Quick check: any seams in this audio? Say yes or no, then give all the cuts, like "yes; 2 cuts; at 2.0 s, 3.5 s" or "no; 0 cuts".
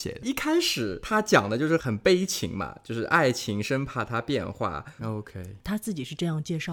yes; 1 cut; at 5.0 s